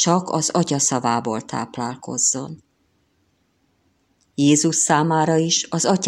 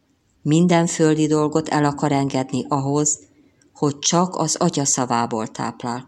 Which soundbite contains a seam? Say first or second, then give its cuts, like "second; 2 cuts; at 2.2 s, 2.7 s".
first; 1 cut; at 4.2 s